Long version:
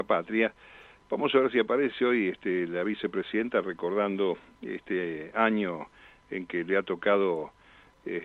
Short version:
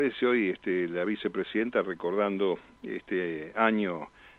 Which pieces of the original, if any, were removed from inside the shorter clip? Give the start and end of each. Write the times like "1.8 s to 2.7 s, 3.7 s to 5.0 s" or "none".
none